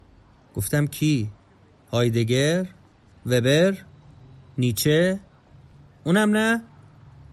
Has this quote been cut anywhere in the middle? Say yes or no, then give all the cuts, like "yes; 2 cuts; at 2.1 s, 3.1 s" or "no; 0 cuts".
no; 0 cuts